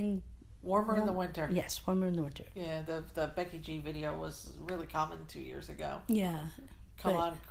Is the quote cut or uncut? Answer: uncut